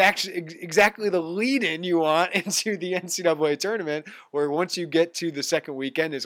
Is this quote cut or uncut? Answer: uncut